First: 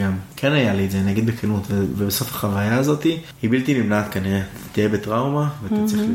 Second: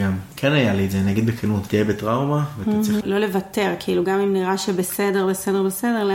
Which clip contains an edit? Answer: second; 2 cuts; at 1.7 s, 3.0 s

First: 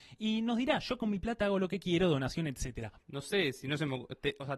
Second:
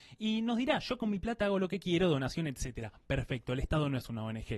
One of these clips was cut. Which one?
first; 1 cut; at 3.0 s

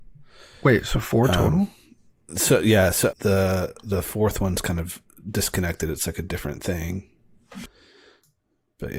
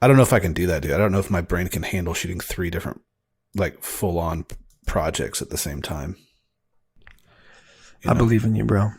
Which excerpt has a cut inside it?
first; 1 cut; at 3.1 s

